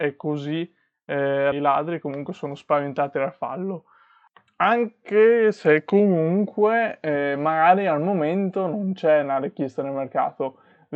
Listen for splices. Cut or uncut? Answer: cut